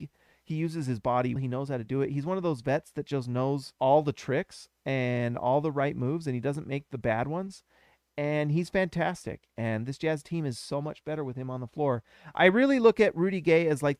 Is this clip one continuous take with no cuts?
no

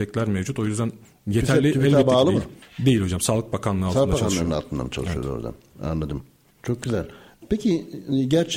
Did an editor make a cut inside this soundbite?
no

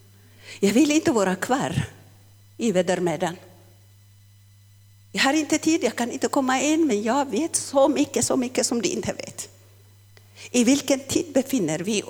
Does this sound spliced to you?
no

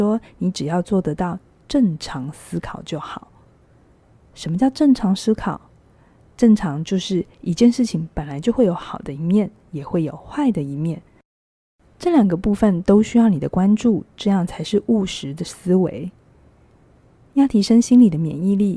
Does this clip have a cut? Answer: no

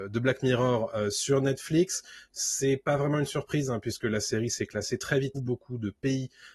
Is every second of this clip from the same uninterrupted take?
no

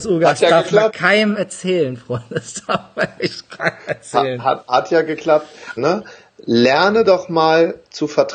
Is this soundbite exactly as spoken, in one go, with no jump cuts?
no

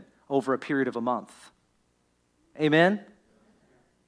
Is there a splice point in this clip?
no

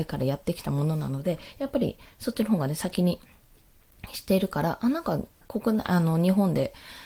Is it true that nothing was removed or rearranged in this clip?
yes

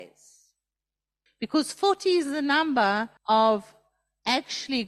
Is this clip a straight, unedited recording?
no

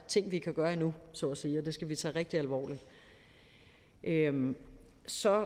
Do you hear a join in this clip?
no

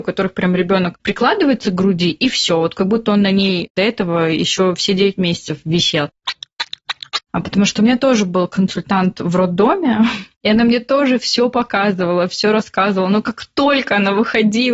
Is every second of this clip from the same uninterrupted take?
no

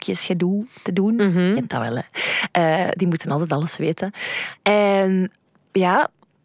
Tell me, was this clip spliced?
no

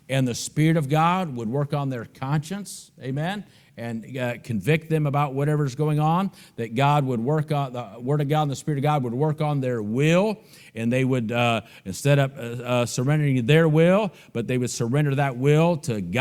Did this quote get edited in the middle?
no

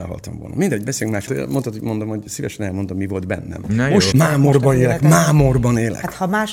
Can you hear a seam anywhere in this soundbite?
yes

